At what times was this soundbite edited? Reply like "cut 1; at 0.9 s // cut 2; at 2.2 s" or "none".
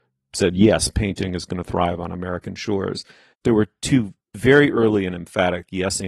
cut 1; at 3.3 s